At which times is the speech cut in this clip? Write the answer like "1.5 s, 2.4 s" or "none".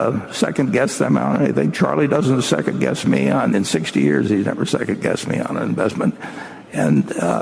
none